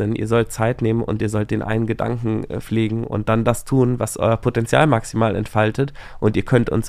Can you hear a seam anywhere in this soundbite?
no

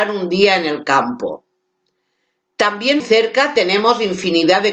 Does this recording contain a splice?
yes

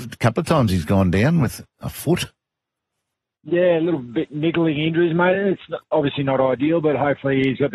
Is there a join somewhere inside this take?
no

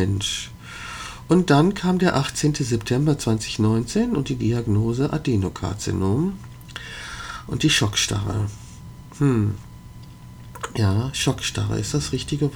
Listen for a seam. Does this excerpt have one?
no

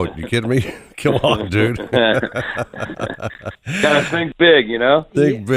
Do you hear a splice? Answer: no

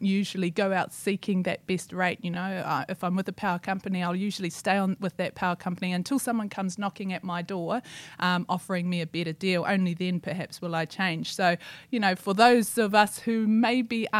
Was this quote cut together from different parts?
no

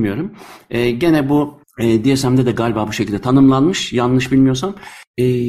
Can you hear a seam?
no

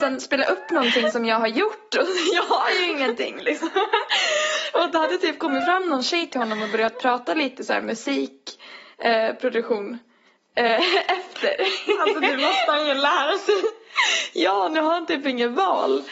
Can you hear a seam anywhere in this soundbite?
no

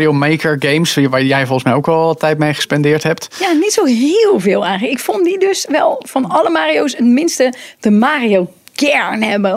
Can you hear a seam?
no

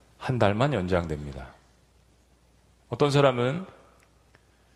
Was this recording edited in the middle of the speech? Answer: no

